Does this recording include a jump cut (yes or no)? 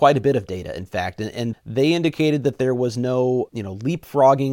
yes